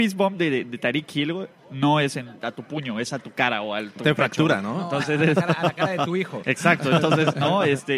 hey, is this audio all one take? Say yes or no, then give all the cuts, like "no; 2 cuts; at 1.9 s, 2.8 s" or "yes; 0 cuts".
yes; 0 cuts